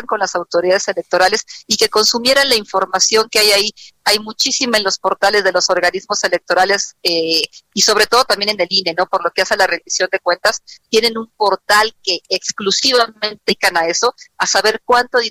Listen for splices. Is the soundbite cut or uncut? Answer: uncut